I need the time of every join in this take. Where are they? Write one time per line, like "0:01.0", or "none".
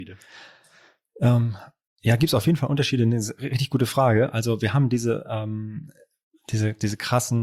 none